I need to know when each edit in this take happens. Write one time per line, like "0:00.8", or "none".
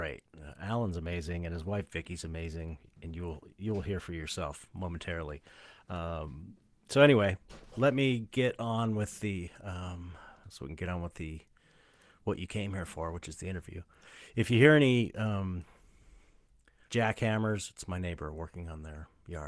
0:10.4
0:16.9